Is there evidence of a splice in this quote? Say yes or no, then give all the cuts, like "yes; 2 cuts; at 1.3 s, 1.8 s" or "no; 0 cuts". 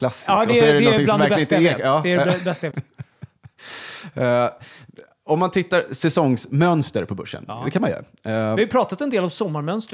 yes; 1 cut; at 2.7 s